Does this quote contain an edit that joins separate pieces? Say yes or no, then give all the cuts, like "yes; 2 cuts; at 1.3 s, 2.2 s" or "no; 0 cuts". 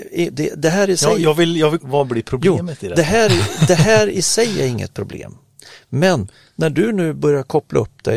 yes; 1 cut; at 1.8 s